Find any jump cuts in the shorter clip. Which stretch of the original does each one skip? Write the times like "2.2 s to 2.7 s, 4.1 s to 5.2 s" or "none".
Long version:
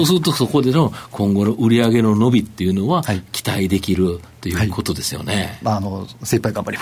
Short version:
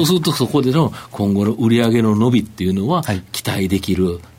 none